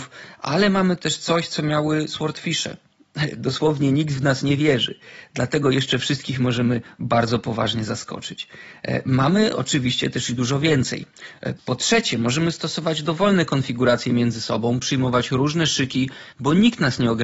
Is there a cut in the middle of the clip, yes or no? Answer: yes